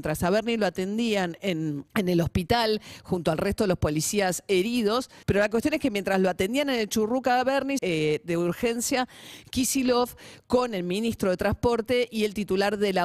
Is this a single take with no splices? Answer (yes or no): no